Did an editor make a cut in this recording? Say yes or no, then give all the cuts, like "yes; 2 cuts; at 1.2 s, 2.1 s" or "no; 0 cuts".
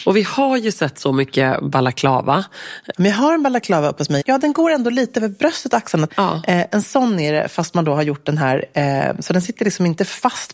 yes; 3 cuts; at 2.9 s, 4.2 s, 6.1 s